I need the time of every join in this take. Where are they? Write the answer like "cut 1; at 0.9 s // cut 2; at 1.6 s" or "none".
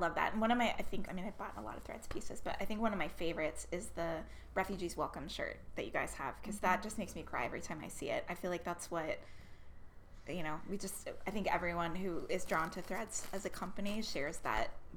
cut 1; at 1.1 s